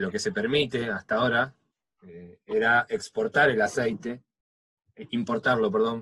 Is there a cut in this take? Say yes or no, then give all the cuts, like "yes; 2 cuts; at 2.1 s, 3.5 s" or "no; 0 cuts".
no; 0 cuts